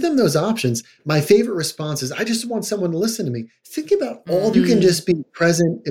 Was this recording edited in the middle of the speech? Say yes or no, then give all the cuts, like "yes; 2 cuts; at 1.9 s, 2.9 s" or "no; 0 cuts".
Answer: yes; 1 cut; at 4.5 s